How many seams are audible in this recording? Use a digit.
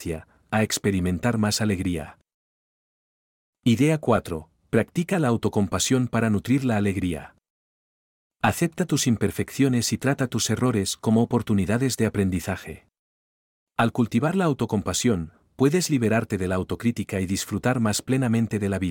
1